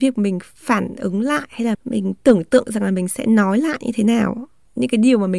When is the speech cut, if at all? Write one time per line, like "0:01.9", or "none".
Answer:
0:01.7